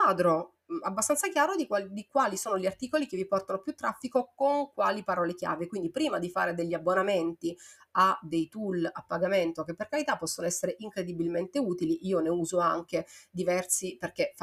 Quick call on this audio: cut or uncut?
uncut